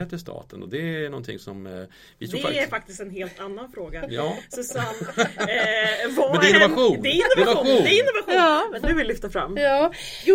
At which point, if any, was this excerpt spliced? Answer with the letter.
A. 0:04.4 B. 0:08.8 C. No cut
B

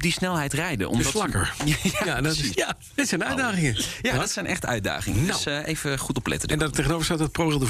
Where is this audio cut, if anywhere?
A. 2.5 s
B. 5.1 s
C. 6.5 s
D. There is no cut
A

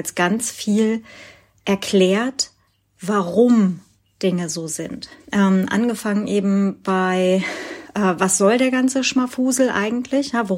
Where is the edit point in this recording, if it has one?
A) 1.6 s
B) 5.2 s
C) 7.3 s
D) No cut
B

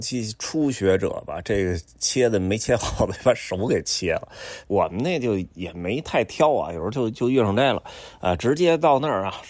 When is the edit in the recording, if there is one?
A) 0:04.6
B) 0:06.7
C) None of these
A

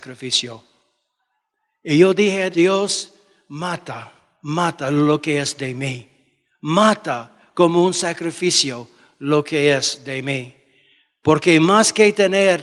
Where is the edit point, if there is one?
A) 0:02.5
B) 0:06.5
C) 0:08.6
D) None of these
A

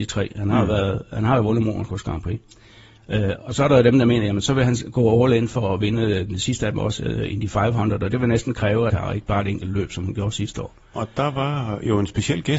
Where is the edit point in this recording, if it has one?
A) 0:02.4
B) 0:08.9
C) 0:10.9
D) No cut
B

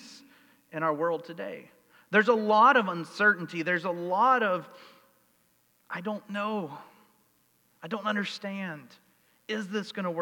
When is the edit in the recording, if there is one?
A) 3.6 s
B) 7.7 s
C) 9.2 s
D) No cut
D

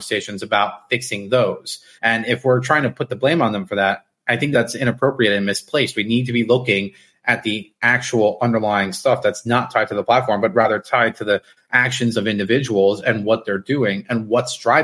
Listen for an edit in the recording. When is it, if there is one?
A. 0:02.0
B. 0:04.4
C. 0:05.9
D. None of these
A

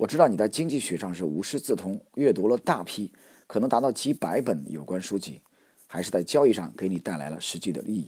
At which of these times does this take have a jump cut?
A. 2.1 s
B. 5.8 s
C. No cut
B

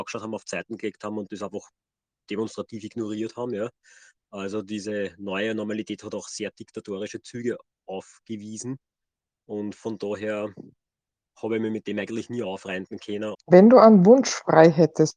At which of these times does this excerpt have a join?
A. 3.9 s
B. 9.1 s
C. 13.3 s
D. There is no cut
C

